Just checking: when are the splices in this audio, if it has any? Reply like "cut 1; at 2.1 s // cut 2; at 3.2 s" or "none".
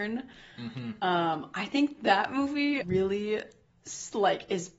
cut 1; at 2.8 s